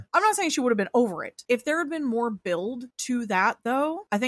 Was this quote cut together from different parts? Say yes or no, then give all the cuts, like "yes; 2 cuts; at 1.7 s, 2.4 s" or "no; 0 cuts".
yes; 1 cut; at 1.5 s